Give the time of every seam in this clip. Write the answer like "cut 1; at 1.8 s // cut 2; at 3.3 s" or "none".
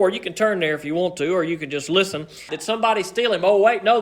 cut 1; at 2.5 s